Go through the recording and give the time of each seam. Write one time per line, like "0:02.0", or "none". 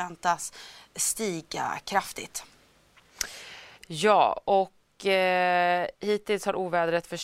0:03.8